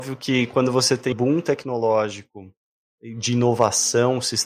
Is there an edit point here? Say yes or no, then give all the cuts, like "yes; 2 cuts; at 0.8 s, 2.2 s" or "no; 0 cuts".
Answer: yes; 1 cut; at 1.1 s